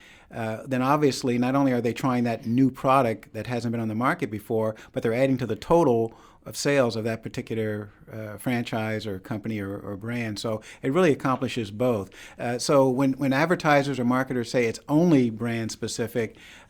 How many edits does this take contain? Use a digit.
0